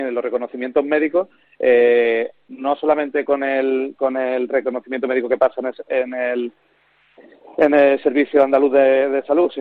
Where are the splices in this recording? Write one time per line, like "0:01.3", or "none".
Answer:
none